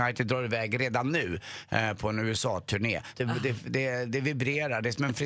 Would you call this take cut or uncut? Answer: cut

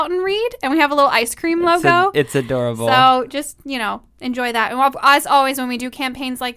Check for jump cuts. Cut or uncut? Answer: uncut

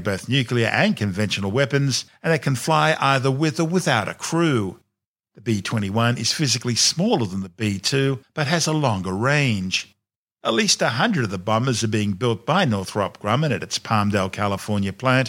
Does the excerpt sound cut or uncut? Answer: uncut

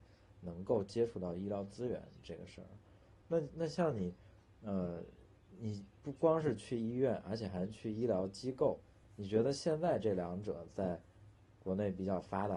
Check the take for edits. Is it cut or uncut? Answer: uncut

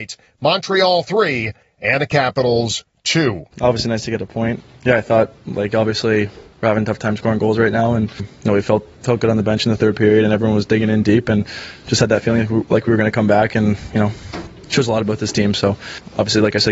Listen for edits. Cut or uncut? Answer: cut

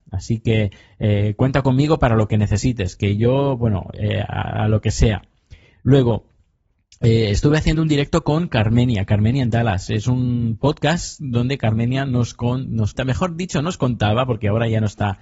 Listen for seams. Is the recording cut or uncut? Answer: cut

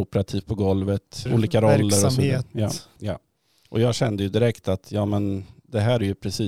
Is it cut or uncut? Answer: cut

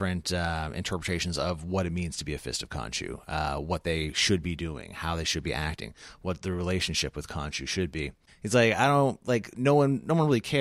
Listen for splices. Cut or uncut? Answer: cut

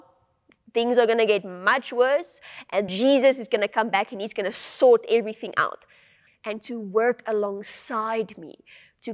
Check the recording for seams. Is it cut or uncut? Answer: cut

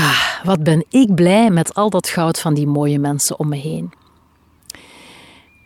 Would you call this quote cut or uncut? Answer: uncut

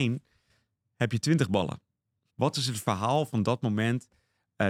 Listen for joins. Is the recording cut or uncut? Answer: cut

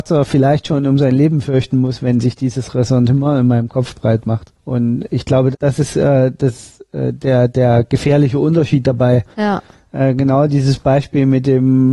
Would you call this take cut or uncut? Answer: cut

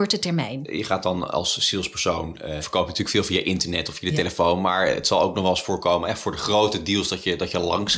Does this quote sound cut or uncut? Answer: cut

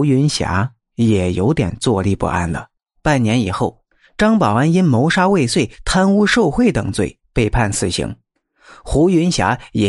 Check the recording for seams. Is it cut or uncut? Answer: cut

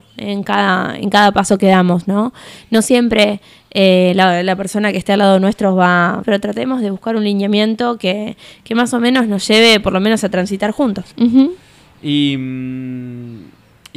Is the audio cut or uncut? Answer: cut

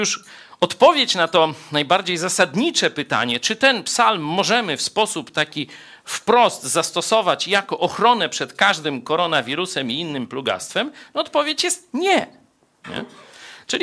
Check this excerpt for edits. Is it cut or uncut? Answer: cut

